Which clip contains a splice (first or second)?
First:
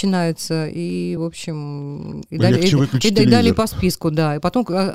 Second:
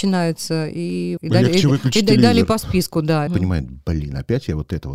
second